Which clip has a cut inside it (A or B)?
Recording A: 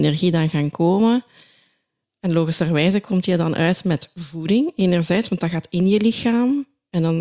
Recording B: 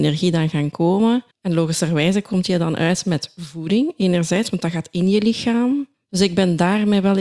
B